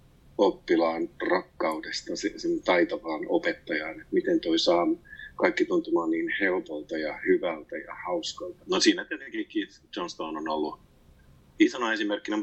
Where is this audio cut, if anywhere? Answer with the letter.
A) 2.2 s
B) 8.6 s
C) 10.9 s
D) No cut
B